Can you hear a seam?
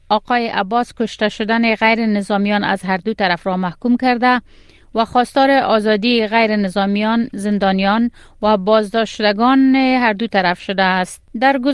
no; 0 cuts

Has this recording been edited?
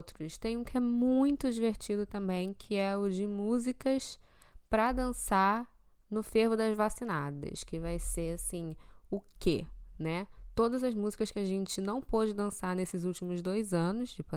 no; 0 cuts

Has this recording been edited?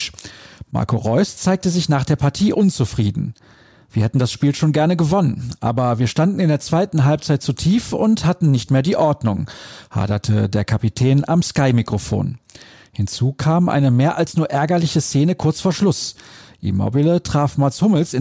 no; 0 cuts

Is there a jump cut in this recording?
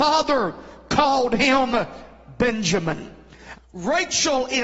yes; 1 cut; at 3.5 s

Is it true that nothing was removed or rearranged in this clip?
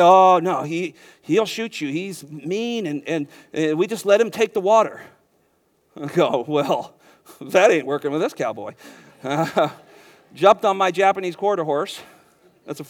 yes; 0 cuts

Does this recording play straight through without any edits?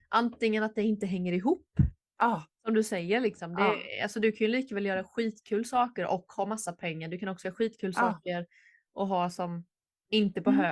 yes; 0 cuts

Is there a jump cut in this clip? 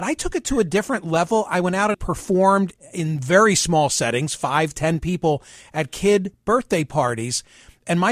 yes; 1 cut; at 1.9 s

